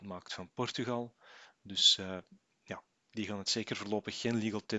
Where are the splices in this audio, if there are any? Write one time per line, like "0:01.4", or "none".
none